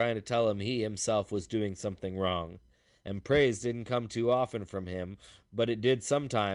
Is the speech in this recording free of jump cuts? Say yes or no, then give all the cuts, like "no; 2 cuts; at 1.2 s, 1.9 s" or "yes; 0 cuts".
yes; 0 cuts